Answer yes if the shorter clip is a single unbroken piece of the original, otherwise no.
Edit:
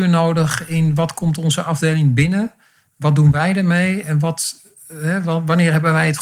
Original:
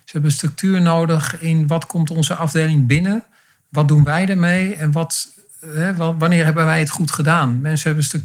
yes